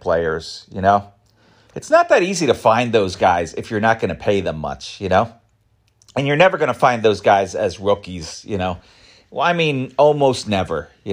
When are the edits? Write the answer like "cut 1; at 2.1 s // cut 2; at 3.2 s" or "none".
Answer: none

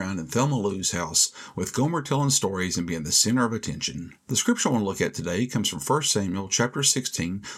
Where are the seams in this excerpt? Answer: cut 1; at 4.2 s

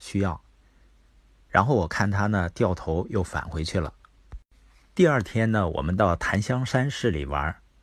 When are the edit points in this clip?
cut 1; at 1.4 s

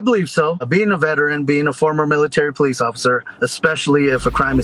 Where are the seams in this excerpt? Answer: cut 1; at 3.4 s

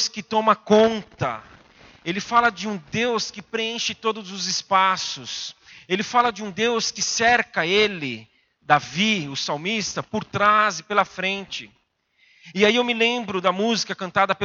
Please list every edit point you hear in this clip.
none

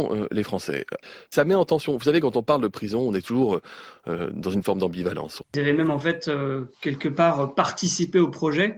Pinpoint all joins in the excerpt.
cut 1; at 1.3 s // cut 2; at 5.4 s

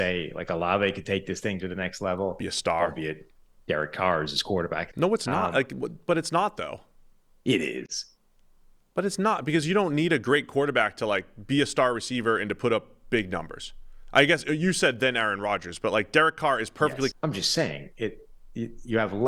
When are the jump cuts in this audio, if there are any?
cut 1; at 4.9 s // cut 2; at 17.1 s

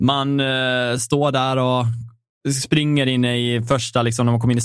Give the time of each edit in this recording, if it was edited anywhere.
none

